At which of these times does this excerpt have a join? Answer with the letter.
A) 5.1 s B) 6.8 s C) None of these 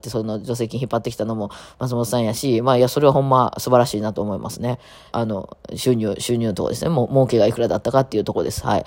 A